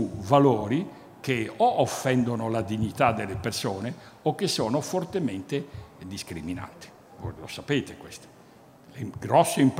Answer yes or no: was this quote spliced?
no